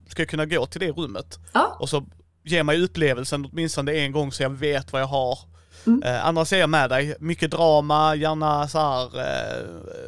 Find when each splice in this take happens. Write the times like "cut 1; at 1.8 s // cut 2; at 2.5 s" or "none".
none